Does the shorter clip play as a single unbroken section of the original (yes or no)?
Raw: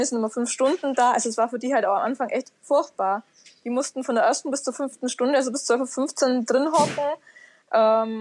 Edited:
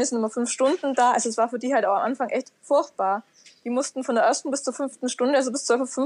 yes